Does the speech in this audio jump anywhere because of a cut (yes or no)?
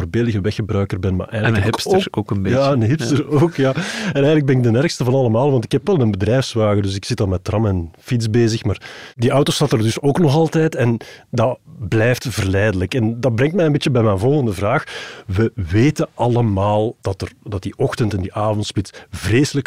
no